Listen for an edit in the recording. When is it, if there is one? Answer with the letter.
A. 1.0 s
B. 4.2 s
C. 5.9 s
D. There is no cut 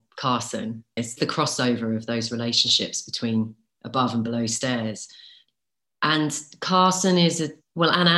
A